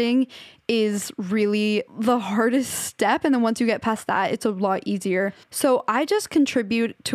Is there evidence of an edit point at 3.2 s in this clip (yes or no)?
no